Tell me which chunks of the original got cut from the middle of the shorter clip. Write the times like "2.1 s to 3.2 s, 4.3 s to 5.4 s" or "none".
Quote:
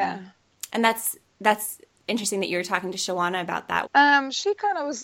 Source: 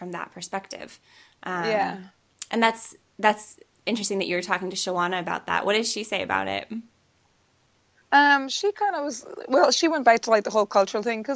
5.6 s to 8.0 s